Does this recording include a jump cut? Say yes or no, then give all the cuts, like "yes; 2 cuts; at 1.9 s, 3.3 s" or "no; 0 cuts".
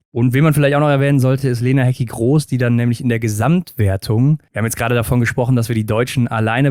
no; 0 cuts